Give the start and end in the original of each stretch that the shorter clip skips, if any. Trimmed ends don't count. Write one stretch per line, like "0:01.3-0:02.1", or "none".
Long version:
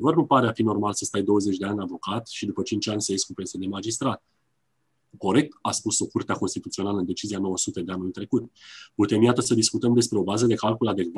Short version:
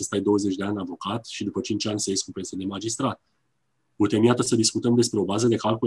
0:04.9-0:08.9